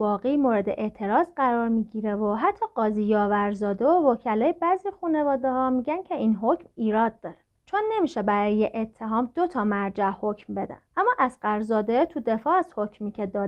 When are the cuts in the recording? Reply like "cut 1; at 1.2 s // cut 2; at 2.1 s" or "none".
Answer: cut 1; at 10.9 s